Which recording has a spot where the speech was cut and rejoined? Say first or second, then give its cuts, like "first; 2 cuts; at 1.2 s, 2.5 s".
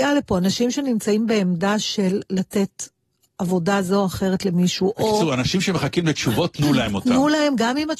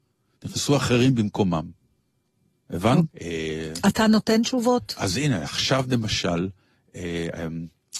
second; 1 cut; at 3.1 s